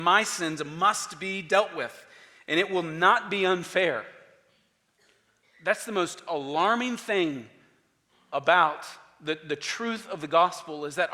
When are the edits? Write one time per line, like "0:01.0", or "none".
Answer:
none

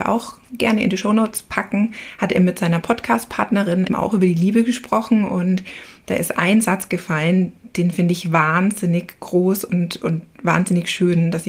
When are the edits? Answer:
0:03.9

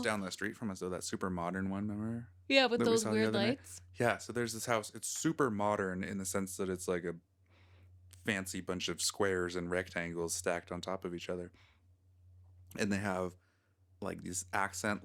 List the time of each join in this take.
none

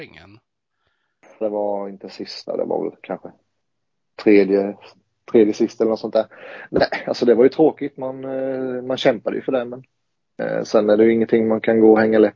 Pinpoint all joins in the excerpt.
0:01.4

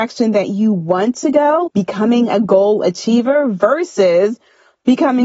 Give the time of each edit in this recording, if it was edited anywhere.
0:01.7

